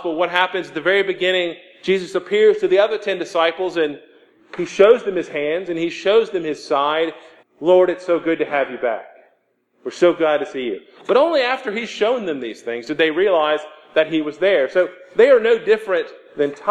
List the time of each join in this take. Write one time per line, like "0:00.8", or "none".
0:07.4